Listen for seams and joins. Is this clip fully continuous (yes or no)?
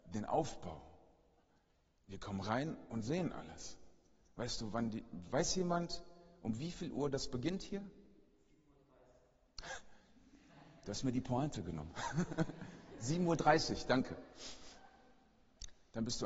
yes